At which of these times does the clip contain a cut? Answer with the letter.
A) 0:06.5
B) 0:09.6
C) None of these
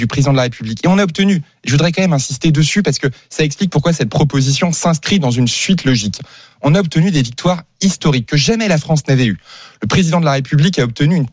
C